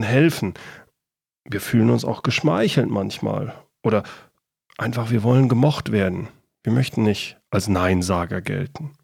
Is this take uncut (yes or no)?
yes